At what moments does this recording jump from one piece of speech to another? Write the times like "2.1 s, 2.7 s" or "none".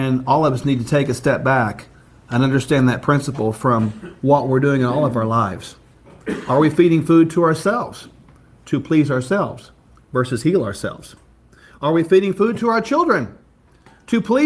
none